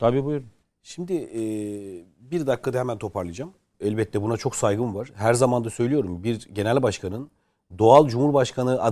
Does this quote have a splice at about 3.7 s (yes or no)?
yes